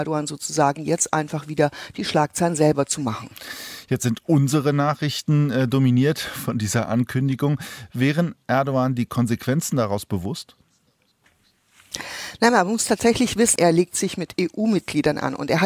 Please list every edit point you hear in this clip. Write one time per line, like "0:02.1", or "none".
0:13.6